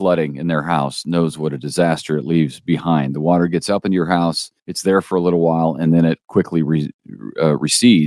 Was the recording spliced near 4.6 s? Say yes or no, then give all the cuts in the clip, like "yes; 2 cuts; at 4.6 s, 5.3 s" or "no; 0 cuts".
yes; 1 cut; at 4.6 s